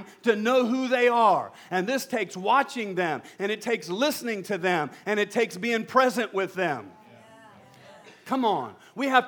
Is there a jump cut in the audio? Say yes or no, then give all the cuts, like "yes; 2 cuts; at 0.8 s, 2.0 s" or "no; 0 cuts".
no; 0 cuts